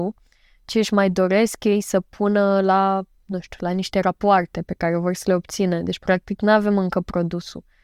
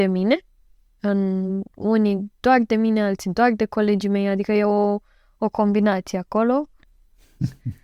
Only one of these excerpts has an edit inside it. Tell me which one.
second; 1 cut; at 6.8 s

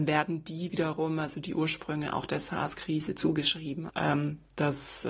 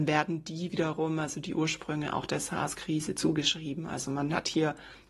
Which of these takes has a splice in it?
first; 1 cut; at 3.9 s

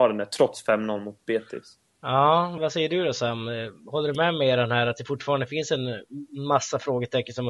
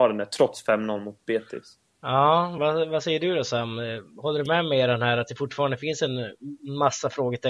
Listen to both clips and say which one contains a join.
first; 1 cut; at 2.6 s

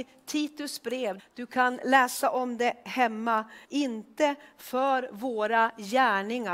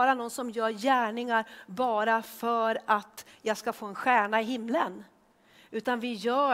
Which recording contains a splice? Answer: first; 2 cuts; at 1.2 s, 3.6 s

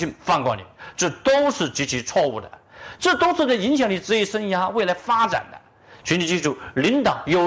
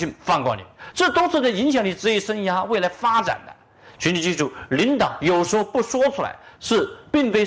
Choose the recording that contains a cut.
second; 1 cut; at 0.9 s

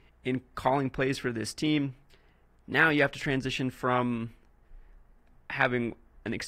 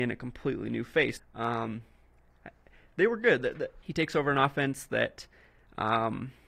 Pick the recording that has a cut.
second; 2 cuts; at 1.2 s, 3.8 s

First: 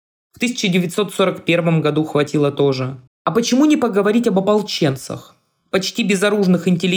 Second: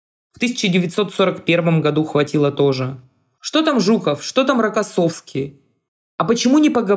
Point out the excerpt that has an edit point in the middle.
first; 1 cut; at 3.1 s

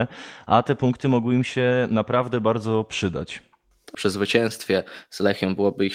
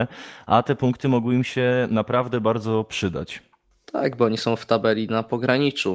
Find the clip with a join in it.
first; 1 cut; at 3.9 s

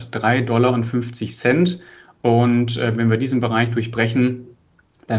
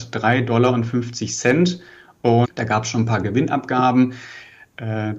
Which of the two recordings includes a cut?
second; 1 cut; at 2.4 s

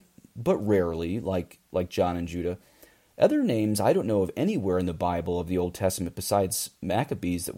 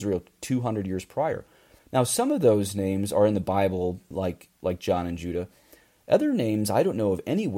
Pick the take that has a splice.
second; 2 cuts; at 1.8 s, 4.1 s

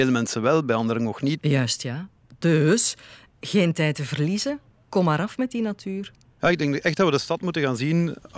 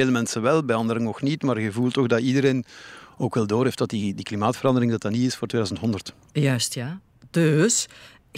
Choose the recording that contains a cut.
first; 1 cut; at 1.4 s

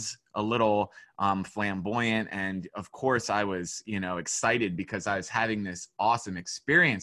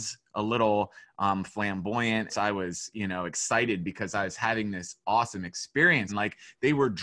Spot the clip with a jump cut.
second; 2 cuts; at 2.3 s, 6.1 s

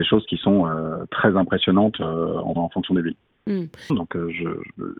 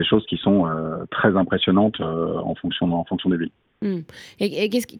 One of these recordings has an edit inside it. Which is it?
first; 2 cuts; at 2.6 s, 3.9 s

